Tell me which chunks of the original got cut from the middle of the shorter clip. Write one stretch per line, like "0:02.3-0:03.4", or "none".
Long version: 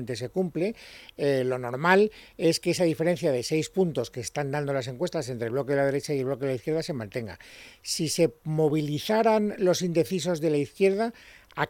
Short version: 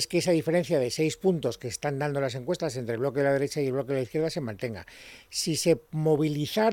none